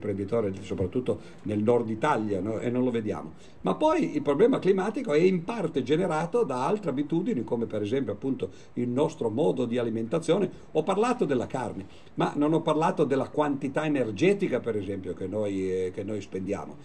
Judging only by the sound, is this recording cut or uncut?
cut